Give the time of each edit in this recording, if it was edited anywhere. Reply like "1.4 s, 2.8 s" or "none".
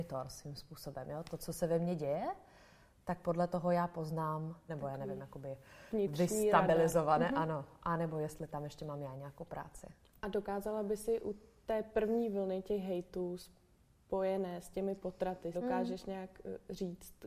4.7 s, 15.5 s